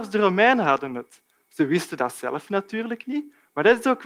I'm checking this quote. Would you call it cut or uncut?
uncut